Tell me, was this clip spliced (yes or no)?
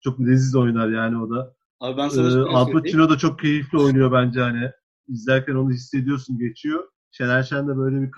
no